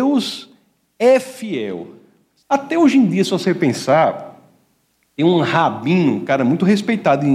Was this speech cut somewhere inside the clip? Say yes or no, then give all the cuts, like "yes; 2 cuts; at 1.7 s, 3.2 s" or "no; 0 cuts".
yes; 1 cut; at 2.4 s